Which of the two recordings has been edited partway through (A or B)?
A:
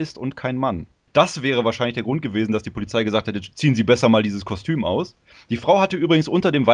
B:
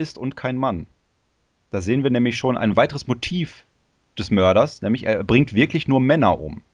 A